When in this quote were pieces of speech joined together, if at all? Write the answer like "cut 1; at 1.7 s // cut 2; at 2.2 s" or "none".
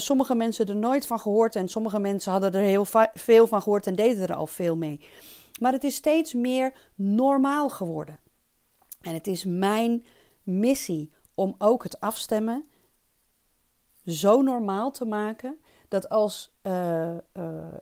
none